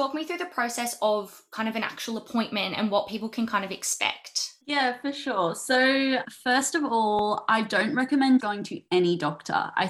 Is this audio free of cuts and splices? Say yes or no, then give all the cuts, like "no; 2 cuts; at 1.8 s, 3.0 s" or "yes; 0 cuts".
no; 3 cuts; at 4.6 s, 6.2 s, 8.4 s